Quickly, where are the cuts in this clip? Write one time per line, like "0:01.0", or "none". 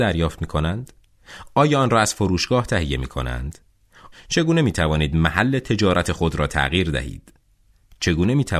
0:04.1